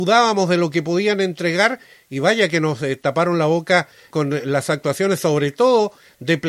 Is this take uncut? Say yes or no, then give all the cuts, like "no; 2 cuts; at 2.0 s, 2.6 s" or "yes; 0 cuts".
no; 1 cut; at 4.1 s